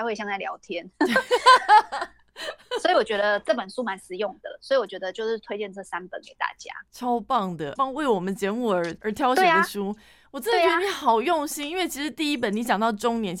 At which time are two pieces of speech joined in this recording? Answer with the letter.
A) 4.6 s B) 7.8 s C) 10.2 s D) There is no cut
B